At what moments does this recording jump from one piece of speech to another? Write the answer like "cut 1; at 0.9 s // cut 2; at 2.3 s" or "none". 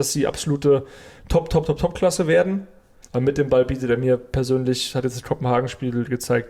cut 1; at 1.6 s // cut 2; at 3.0 s